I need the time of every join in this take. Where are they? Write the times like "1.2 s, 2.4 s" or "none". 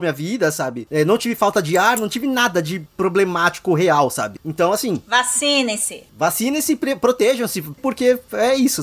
7.8 s